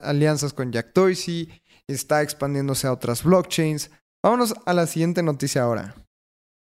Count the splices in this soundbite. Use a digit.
1